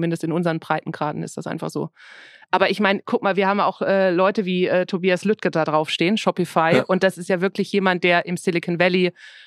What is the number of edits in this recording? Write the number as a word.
zero